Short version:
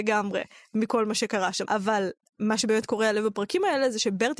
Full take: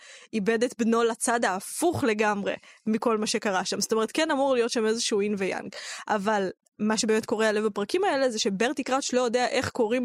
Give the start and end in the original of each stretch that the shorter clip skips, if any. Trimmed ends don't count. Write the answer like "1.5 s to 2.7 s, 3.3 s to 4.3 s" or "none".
3.8 s to 6.0 s